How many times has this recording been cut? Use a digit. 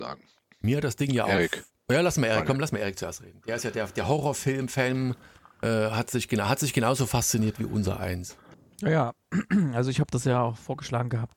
0